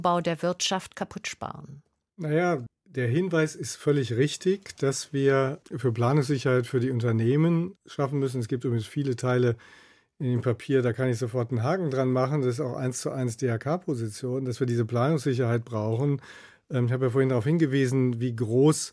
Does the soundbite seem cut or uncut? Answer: uncut